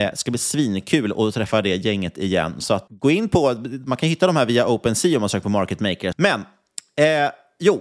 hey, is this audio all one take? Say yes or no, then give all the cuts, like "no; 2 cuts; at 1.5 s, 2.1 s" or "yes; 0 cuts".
no; 2 cuts; at 2.9 s, 6.1 s